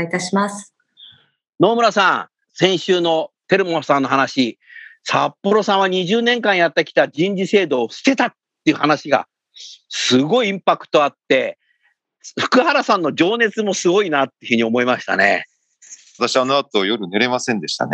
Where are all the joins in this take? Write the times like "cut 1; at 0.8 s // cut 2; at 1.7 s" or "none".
cut 1; at 2.4 s // cut 2; at 16.2 s